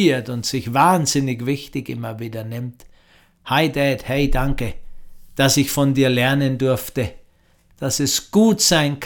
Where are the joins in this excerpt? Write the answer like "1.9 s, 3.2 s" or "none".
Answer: none